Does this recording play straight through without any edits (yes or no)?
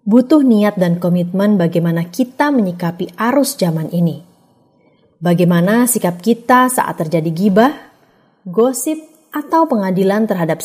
yes